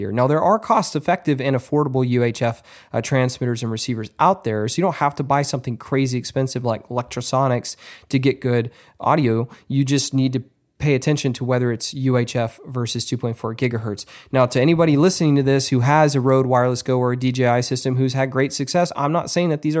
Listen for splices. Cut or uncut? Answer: uncut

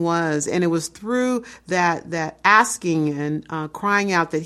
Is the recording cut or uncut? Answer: uncut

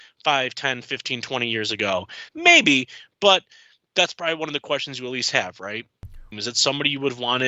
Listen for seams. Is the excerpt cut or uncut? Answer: cut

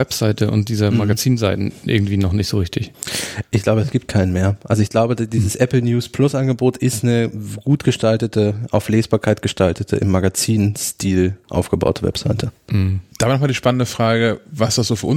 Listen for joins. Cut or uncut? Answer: cut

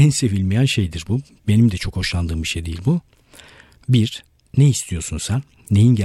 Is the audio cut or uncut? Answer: uncut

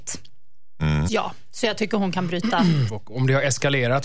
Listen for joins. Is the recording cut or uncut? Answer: cut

